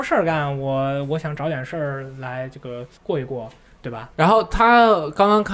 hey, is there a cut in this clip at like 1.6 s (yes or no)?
no